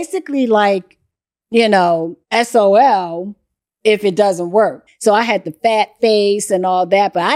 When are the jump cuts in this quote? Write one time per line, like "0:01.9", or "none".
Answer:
0:02.2
0:04.9